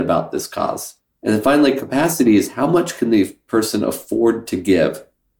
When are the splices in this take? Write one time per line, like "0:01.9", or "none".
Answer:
none